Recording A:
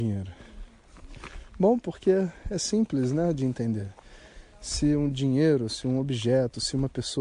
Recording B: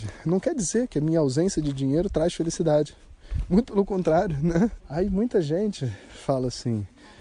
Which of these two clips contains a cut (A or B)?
B